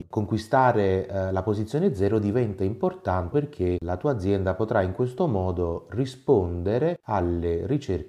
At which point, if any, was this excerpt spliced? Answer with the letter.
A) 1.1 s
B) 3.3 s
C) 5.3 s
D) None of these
B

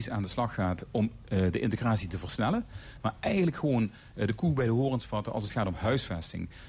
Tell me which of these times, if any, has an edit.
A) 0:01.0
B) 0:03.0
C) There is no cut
B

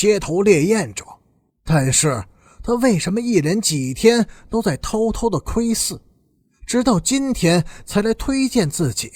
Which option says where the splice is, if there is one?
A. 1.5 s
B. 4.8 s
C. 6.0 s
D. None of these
A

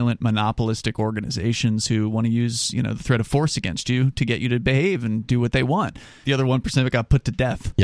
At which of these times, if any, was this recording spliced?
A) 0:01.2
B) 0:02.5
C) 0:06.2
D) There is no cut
C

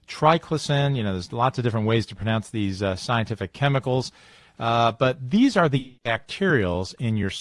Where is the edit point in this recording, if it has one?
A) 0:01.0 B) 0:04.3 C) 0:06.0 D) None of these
C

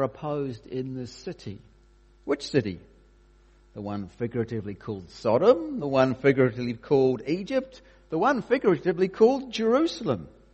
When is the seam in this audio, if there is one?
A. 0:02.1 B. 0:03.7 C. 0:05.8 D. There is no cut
D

